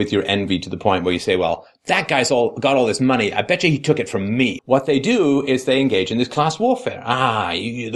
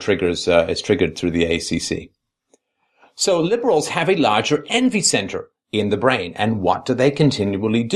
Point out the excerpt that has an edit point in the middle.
first; 1 cut; at 4.6 s

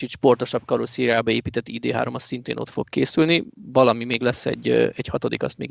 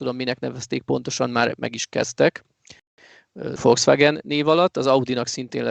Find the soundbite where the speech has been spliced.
second; 1 cut; at 3.6 s

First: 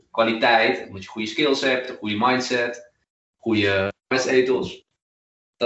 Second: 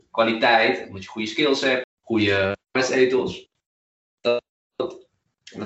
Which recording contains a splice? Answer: second; 1 cut; at 1.8 s

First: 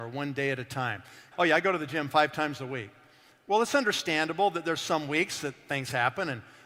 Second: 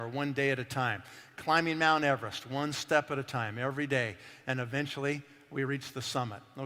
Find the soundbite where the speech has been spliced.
first; 1 cut; at 1.3 s

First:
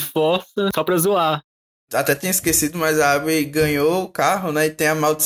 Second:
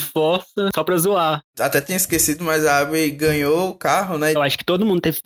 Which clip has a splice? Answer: second; 2 cuts; at 1.5 s, 4.3 s

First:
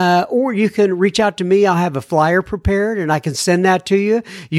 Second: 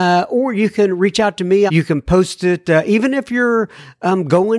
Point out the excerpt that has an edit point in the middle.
second; 1 cut; at 1.7 s

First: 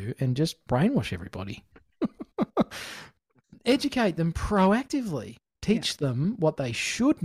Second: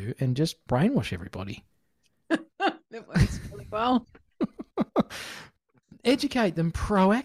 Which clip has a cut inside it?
first; 1 cut; at 1.7 s

